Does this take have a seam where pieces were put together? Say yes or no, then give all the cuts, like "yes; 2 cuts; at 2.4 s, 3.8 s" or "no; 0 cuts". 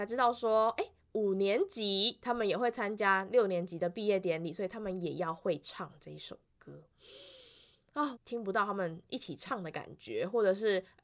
yes; 1 cut; at 8.1 s